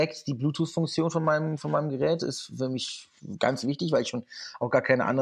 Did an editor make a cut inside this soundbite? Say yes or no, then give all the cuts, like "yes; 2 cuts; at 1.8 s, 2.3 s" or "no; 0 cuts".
no; 0 cuts